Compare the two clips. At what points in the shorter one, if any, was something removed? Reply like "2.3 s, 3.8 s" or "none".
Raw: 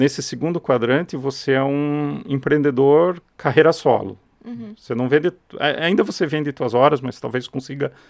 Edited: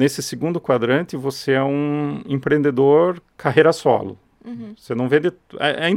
none